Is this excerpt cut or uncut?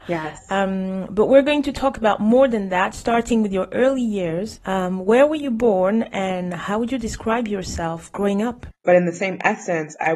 cut